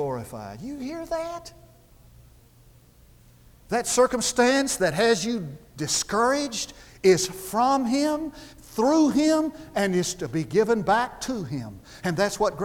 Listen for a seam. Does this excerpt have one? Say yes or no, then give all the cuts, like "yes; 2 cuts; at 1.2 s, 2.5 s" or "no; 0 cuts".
no; 0 cuts